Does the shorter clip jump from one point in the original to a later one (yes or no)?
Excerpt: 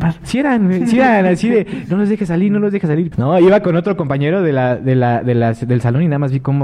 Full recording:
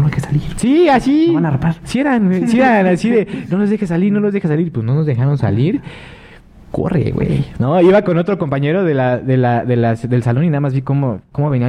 yes